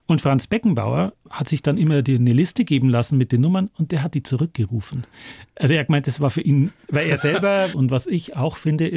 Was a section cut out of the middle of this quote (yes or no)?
yes